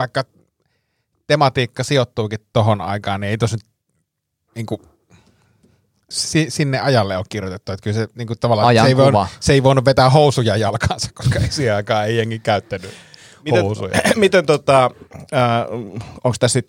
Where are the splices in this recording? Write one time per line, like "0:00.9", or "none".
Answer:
0:06.1